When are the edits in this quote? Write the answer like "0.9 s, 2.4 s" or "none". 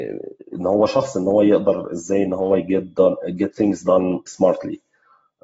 4.3 s